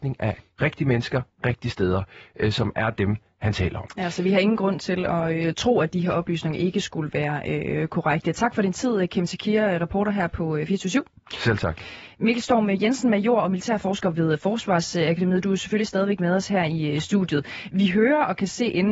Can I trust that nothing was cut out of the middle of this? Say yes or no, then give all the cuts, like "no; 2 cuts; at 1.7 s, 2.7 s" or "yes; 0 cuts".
yes; 0 cuts